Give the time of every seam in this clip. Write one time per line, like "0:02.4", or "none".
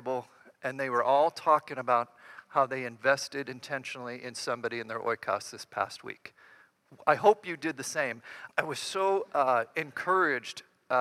0:08.5

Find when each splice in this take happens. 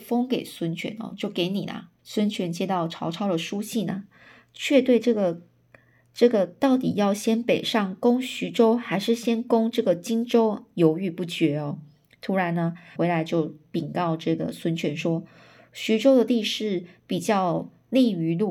0:02.0
0:13.0

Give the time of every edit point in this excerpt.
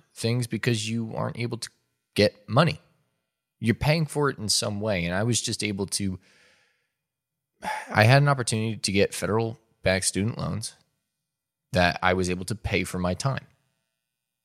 none

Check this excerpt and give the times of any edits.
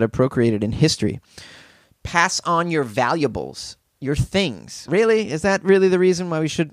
0:04.9

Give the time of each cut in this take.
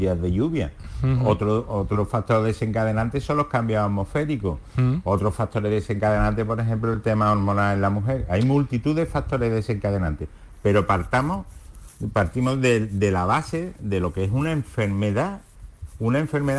none

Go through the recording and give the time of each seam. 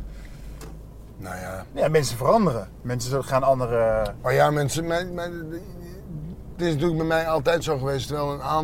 none

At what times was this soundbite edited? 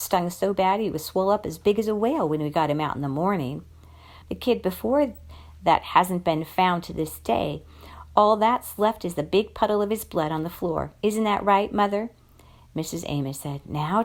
0:04.2

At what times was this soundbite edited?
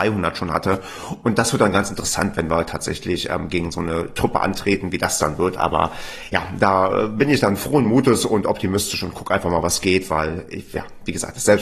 none

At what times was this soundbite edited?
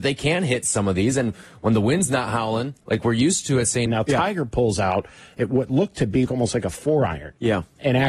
0:03.9
0:06.3

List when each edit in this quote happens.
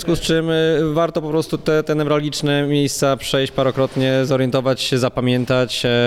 none

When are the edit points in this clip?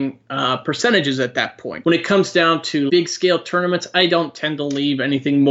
0:01.8
0:02.9

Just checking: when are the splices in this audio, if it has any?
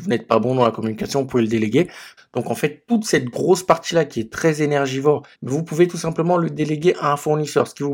0:02.2
0:05.3

